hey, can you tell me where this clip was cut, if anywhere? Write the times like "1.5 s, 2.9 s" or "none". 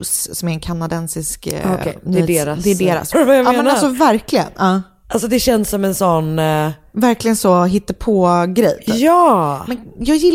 3.1 s